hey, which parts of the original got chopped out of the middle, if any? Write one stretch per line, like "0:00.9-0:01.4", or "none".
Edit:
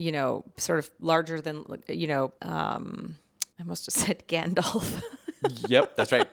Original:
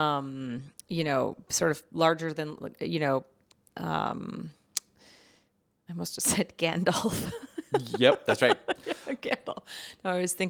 0:03.3-0:03.7
0:04.9-0:05.8